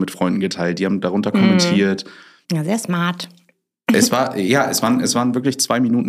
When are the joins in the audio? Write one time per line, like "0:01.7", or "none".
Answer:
0:02.4